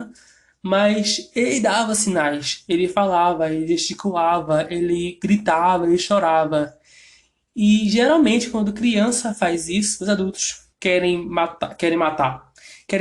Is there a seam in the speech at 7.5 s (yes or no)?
no